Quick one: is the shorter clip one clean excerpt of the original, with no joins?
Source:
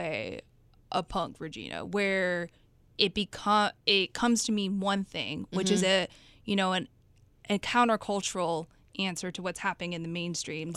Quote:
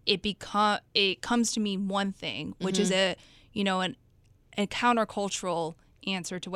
yes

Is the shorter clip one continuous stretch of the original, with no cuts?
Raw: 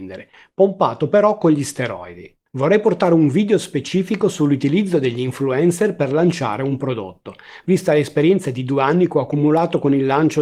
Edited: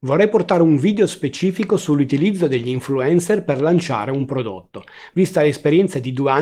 yes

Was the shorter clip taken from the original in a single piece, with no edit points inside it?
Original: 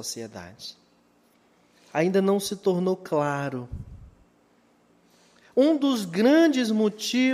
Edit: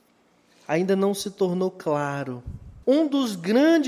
no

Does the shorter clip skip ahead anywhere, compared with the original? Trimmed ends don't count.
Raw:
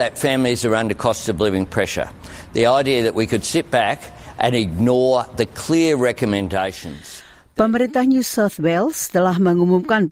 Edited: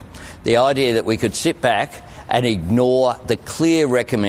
no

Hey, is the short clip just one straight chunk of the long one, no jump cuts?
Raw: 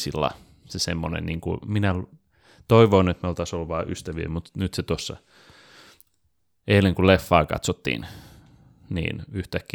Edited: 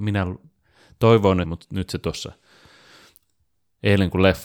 no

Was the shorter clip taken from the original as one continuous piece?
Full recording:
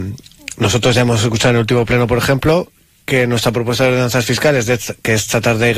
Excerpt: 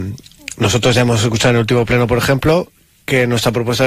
yes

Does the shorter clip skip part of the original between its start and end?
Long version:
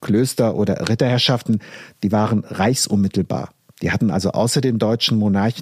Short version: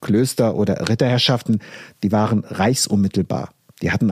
no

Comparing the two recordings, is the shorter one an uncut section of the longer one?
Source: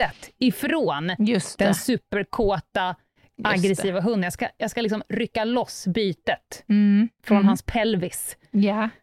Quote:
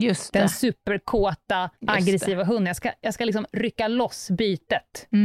no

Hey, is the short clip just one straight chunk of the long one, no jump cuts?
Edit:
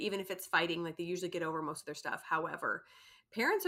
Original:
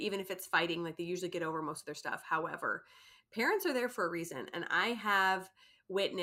yes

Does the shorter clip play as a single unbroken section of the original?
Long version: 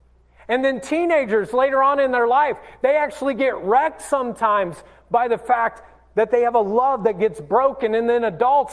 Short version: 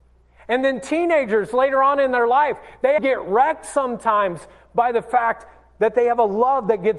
no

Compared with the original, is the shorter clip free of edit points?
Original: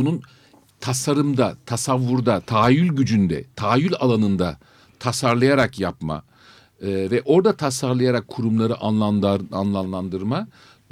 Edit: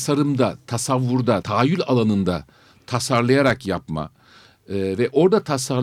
no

